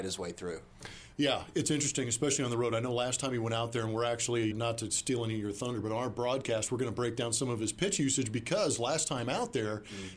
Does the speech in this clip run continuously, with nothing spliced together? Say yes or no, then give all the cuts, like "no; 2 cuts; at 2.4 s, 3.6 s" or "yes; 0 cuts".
no; 1 cut; at 4.5 s